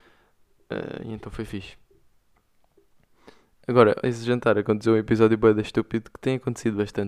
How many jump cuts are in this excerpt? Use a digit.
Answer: 1